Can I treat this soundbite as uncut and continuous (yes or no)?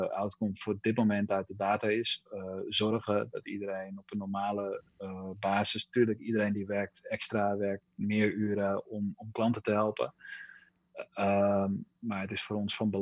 yes